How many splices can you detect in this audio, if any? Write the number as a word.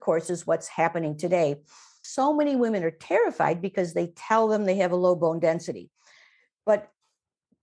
one